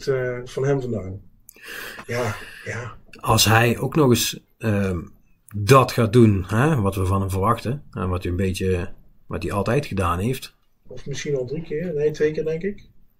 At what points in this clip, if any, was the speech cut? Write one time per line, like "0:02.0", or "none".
0:02.0
0:10.9